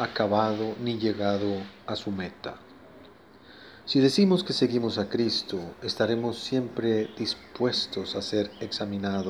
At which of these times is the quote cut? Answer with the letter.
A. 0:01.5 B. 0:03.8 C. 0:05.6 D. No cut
B